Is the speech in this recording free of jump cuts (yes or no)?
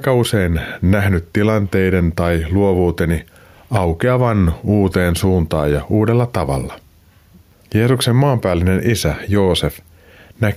no